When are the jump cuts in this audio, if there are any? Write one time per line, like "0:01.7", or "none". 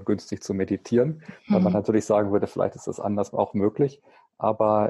none